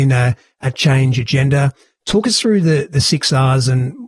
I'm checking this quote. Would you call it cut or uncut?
uncut